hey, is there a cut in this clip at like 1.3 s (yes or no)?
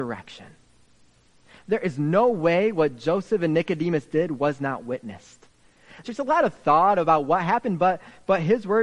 no